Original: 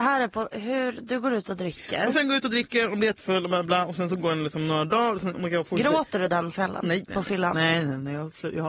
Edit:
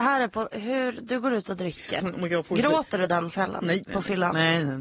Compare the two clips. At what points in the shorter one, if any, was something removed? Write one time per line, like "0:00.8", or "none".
0:02.0